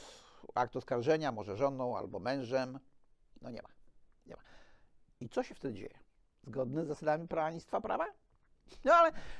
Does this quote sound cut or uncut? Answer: cut